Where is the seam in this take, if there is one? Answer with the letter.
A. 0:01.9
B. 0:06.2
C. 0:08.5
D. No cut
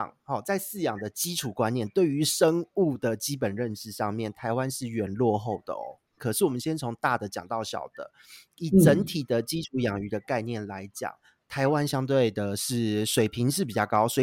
B